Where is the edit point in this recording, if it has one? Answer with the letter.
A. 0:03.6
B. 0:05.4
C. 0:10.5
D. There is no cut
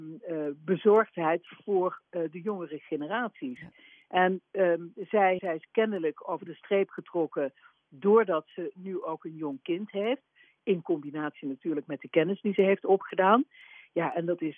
B